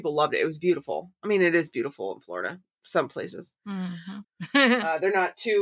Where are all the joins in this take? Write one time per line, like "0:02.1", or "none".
0:04.2